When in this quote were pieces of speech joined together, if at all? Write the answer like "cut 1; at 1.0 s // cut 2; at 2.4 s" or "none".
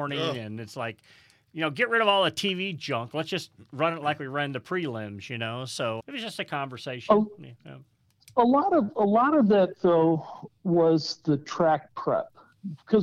cut 1; at 6.0 s